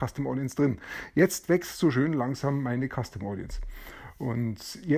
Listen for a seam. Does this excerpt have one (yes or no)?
no